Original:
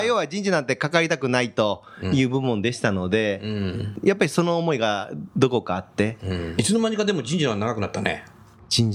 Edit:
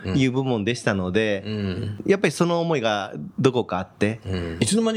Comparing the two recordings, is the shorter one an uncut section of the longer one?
yes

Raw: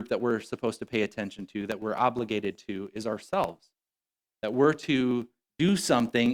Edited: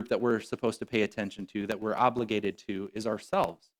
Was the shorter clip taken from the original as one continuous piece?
yes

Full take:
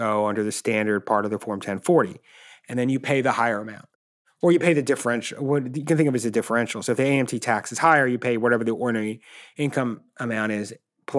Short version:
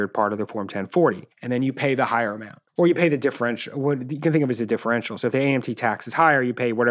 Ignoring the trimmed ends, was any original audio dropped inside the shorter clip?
yes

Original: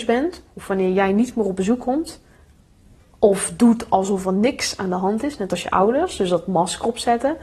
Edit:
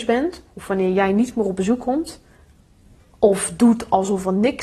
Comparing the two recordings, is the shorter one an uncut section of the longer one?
yes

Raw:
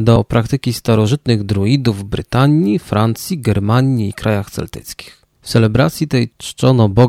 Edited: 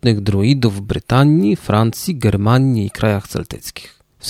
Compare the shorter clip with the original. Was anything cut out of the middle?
no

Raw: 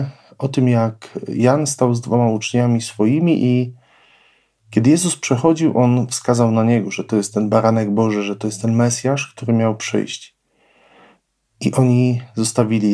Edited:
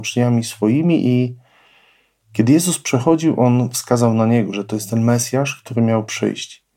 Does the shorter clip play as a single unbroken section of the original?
no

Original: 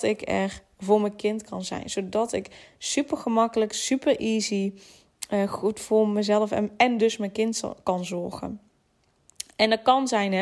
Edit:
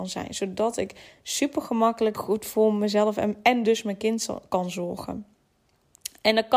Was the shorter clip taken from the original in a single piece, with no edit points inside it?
no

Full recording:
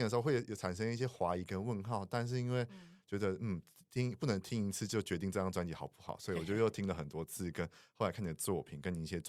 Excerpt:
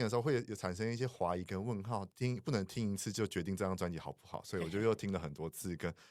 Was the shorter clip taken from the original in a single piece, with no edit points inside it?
no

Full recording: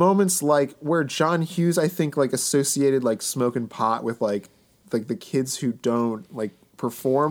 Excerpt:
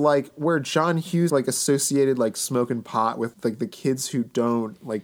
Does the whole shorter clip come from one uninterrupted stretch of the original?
no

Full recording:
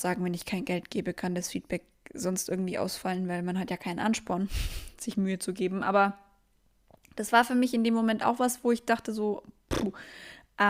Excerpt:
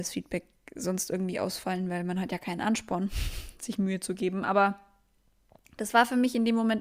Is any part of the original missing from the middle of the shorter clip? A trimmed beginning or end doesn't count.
no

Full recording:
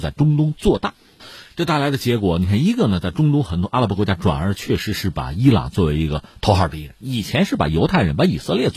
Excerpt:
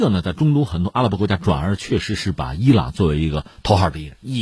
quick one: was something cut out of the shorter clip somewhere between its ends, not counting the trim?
no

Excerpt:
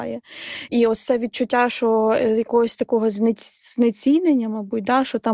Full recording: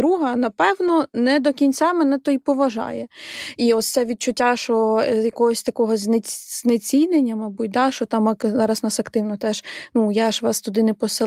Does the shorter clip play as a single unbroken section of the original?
yes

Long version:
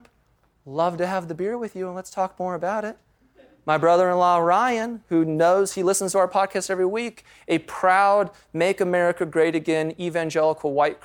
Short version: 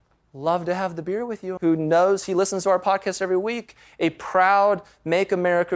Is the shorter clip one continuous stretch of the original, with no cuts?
no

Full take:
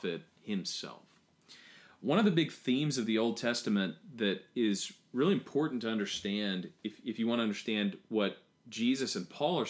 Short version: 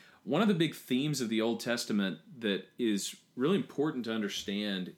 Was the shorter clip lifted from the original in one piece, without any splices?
yes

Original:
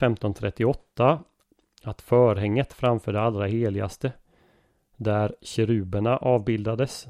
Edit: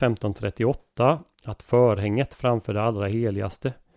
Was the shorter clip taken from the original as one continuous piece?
no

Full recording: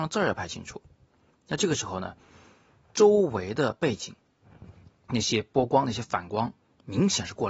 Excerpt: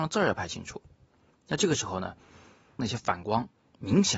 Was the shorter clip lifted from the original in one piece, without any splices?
no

